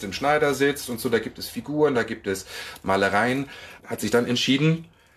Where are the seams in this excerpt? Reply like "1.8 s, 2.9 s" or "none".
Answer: 1.9 s, 3.8 s